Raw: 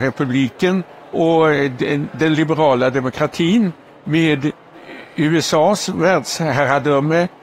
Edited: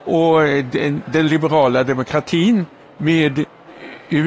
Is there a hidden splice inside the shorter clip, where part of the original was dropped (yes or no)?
no